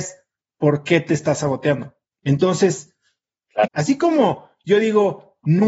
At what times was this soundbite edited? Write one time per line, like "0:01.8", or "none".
0:02.2
0:03.6